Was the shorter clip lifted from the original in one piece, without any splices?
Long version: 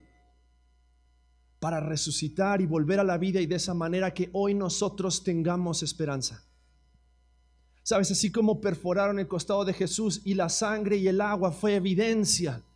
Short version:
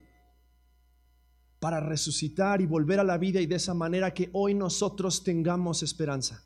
yes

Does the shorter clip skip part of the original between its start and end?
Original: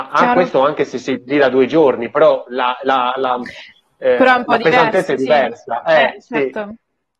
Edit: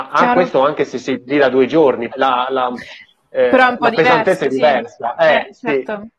yes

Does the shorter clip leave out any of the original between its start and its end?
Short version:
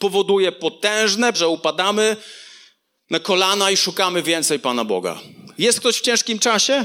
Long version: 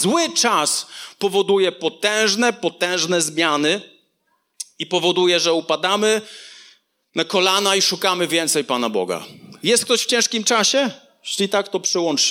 yes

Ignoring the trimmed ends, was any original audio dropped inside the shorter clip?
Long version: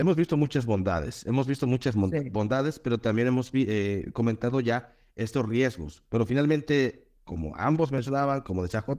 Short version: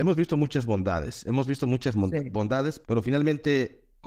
yes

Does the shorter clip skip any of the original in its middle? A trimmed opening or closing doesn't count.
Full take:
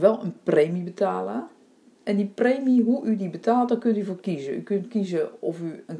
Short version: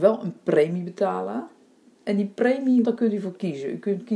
yes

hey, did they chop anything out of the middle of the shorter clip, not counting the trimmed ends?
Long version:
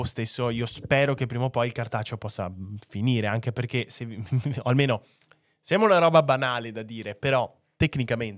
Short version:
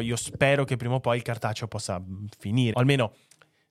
yes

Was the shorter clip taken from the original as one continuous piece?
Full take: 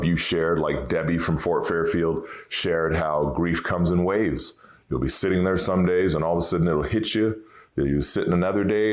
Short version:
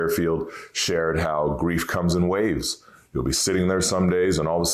yes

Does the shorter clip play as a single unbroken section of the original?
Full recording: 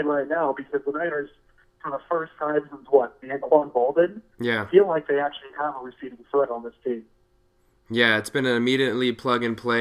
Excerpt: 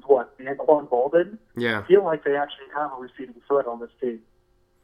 yes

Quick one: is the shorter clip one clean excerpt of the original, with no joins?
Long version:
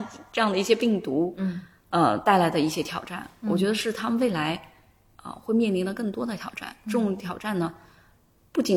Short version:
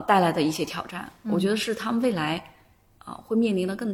yes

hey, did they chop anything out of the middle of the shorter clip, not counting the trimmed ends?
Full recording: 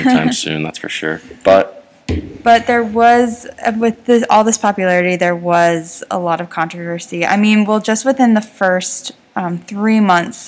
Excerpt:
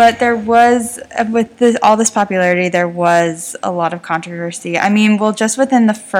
no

